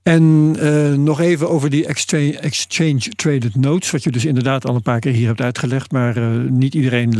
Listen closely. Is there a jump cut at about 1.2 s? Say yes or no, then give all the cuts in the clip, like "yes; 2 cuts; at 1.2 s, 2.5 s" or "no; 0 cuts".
no; 0 cuts